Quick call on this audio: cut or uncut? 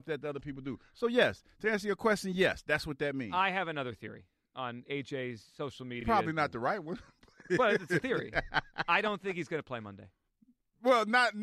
uncut